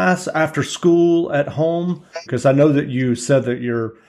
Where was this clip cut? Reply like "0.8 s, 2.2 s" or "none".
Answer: 2.3 s